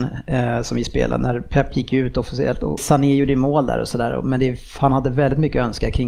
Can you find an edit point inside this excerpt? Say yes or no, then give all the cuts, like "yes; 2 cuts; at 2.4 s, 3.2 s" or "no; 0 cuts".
yes; 1 cut; at 2.8 s